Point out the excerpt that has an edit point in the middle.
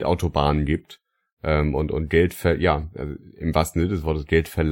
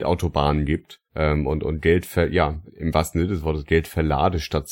second; 2 cuts; at 1.1 s, 2.7 s

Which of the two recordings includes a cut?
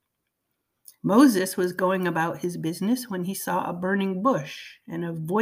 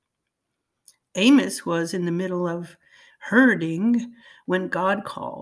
second; 1 cut; at 1.0 s

